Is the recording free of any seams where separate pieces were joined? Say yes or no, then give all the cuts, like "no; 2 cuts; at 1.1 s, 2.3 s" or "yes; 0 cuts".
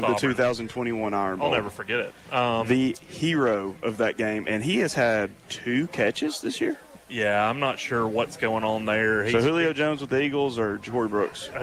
yes; 0 cuts